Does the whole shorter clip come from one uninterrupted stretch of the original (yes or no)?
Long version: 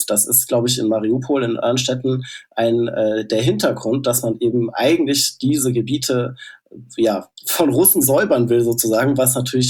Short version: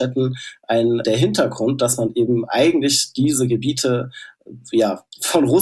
no